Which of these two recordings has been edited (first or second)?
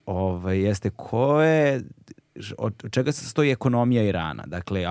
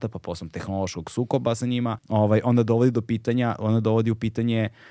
second